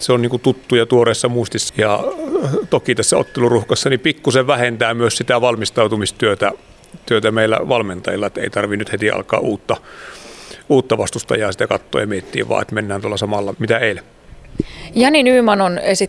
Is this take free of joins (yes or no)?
no